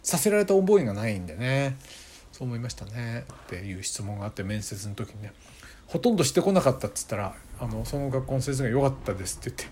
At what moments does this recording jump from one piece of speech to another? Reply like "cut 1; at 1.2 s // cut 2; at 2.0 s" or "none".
cut 1; at 3.3 s